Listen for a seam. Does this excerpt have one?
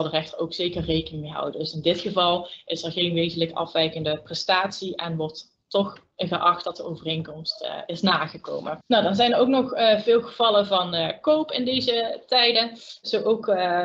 no; 0 cuts

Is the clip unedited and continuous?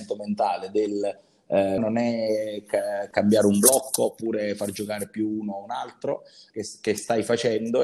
no; 2 cuts; at 1.8 s, 6.5 s

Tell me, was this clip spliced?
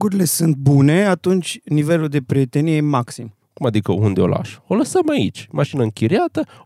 yes; 1 cut; at 3.4 s

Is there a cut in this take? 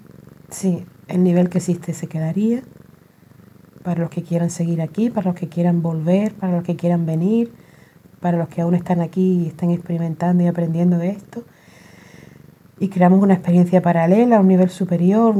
no; 0 cuts

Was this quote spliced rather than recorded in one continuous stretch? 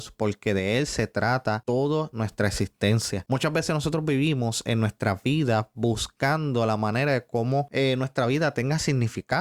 no; 0 cuts

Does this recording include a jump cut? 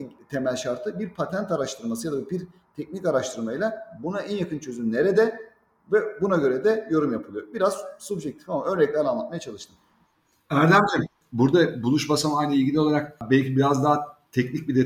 no; 0 cuts

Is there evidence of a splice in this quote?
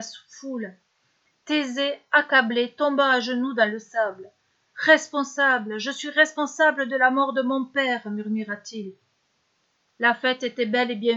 no; 0 cuts

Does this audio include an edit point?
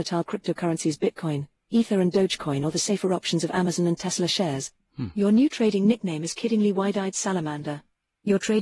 no; 0 cuts

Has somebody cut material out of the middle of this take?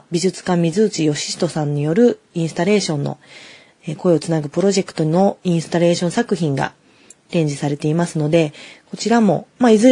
no; 0 cuts

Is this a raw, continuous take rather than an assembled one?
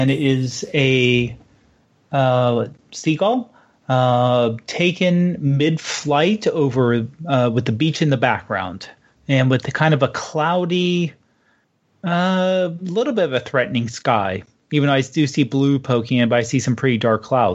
yes; 0 cuts

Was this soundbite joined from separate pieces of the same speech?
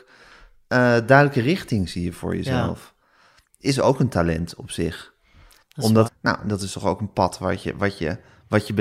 yes; 1 cut; at 6.0 s

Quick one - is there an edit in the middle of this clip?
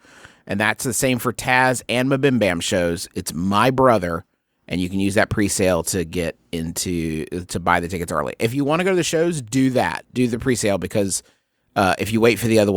no; 0 cuts

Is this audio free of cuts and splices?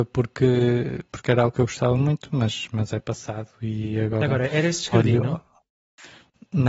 yes; 0 cuts

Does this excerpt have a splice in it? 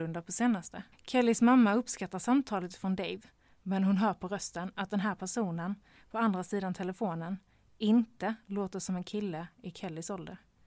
yes; 1 cut; at 0.9 s

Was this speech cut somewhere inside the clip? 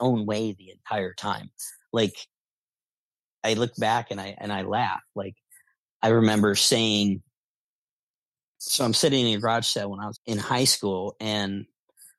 yes; 1 cut; at 10.1 s

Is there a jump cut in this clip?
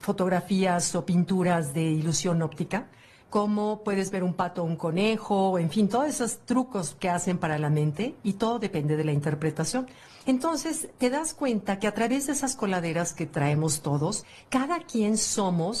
no; 0 cuts

